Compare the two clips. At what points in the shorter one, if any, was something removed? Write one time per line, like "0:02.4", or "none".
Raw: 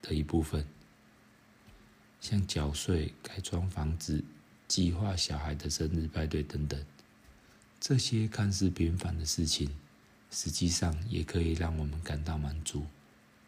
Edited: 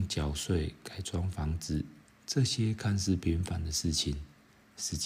0:02.1

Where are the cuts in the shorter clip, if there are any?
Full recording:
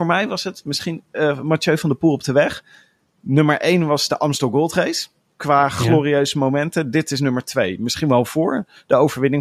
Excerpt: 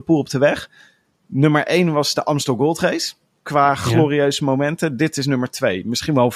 none

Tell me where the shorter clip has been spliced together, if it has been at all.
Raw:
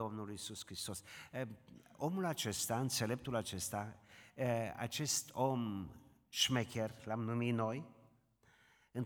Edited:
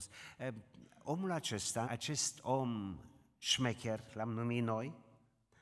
0:01.8

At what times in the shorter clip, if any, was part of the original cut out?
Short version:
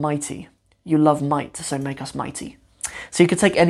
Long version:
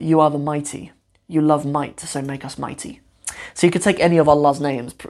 none

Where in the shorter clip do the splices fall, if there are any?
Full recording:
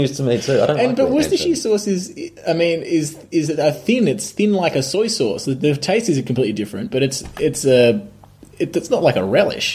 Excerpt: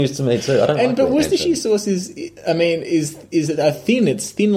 none

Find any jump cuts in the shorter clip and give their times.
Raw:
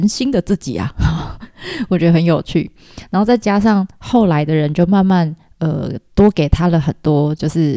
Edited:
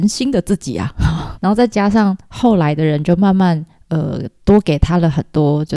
0:01.4

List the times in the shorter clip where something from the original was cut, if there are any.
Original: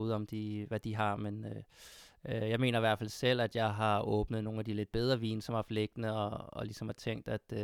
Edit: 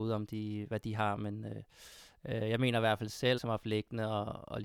0:03.4

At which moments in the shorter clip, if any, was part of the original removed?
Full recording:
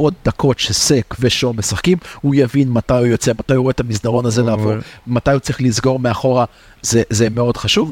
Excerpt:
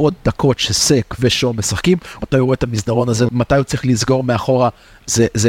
0:02.2
0:03.3

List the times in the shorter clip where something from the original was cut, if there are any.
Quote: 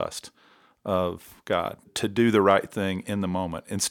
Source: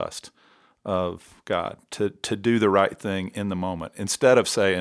0:01.8

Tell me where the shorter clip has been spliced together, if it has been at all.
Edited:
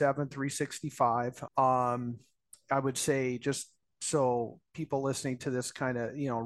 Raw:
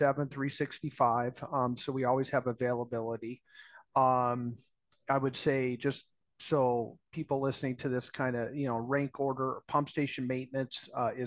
0:01.5

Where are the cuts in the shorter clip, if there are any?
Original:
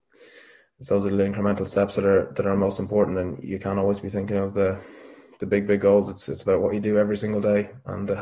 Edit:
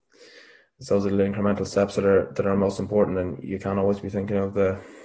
none

